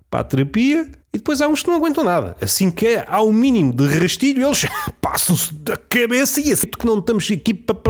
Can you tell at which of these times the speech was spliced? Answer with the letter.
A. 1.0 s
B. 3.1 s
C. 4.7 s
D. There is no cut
A